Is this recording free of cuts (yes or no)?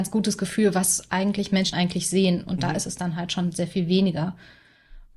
no